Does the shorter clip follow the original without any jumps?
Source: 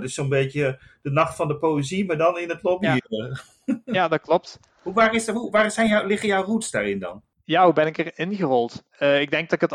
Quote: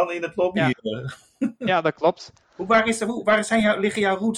yes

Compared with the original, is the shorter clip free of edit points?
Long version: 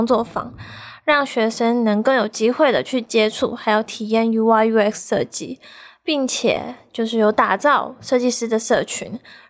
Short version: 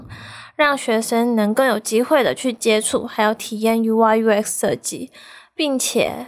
yes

